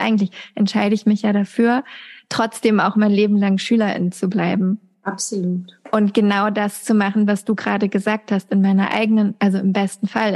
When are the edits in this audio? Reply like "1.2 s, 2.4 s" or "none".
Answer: none

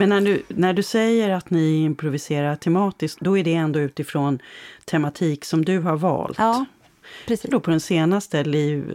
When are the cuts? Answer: 3.2 s, 7.5 s

